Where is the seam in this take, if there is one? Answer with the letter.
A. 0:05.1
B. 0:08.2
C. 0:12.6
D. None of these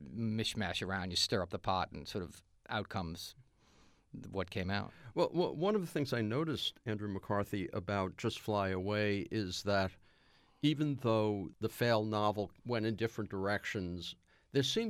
C